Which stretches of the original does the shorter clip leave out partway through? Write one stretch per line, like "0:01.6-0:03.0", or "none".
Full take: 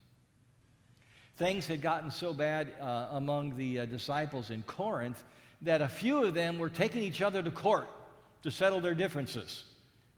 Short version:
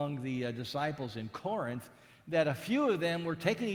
none